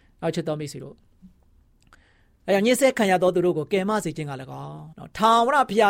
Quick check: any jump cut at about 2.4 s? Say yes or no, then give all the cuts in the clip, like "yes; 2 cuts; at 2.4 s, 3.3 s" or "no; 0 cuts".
no; 1 cut; at 4.9 s